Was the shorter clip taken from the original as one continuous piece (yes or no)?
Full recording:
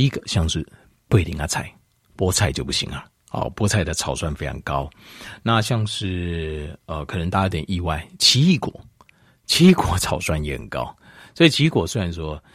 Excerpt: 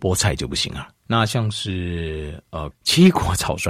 no